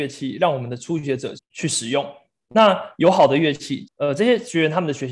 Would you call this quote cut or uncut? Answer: cut